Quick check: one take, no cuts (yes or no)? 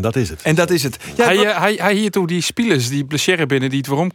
yes